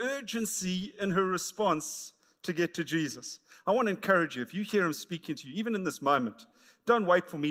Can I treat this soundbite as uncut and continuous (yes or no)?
yes